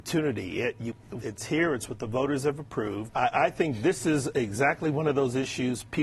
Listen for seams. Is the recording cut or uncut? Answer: cut